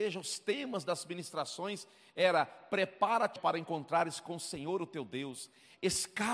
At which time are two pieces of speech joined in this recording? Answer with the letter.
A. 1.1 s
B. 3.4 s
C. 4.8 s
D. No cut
B